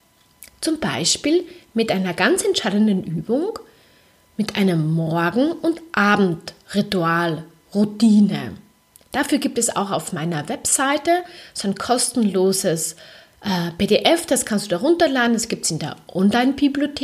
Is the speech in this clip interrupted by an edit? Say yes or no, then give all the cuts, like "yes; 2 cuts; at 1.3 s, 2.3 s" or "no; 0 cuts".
no; 0 cuts